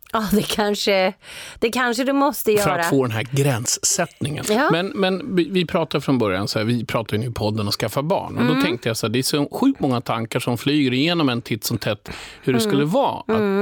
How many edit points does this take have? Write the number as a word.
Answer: one